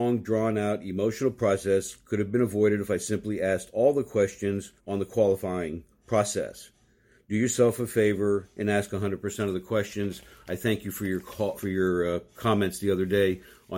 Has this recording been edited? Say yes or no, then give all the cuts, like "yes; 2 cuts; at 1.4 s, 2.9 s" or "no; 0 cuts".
yes; 2 cuts; at 4.8 s, 11.5 s